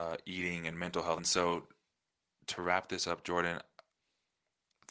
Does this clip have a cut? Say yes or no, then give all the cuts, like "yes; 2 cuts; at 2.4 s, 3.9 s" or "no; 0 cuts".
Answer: yes; 1 cut; at 1.2 s